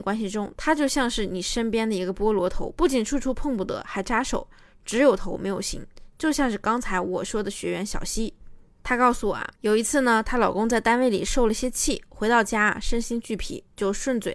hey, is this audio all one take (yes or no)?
yes